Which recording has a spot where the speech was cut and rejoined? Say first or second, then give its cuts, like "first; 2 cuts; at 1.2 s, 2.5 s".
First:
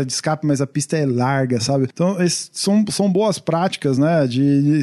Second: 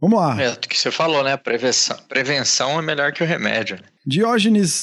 first; 1 cut; at 1.9 s